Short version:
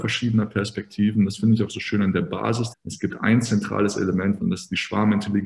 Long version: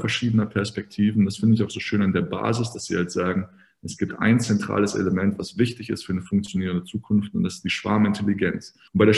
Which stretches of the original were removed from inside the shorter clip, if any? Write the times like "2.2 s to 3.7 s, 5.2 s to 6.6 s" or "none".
2.7 s to 3.7 s, 5.4 s to 7.3 s